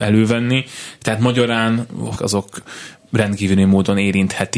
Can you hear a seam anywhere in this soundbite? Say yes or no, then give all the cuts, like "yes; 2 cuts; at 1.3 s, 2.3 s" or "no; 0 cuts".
yes; 1 cut; at 2.1 s